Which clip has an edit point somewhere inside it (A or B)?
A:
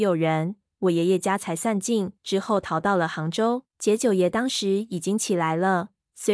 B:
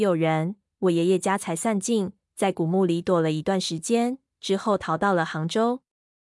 A